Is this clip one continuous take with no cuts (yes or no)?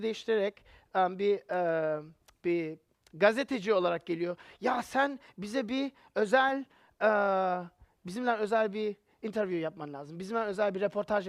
yes